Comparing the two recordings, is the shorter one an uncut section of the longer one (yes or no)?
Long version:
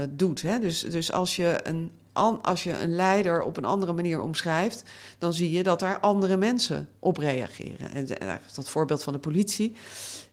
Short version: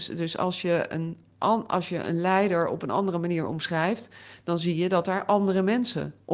yes